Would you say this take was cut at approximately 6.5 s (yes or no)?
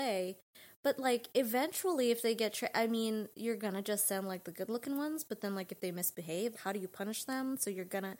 yes